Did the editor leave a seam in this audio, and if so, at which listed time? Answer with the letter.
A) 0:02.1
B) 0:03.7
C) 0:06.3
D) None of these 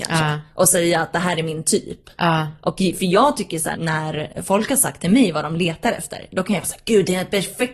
B